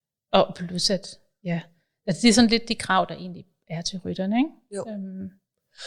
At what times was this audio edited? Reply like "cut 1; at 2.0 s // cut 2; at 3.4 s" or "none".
none